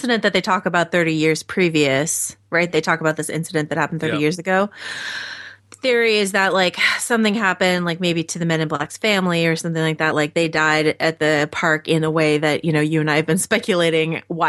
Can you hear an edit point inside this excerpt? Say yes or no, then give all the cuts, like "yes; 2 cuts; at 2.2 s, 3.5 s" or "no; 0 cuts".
no; 0 cuts